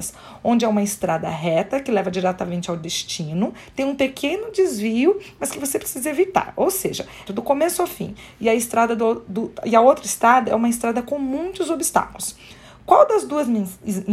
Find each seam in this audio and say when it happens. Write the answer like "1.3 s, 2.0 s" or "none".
7.3 s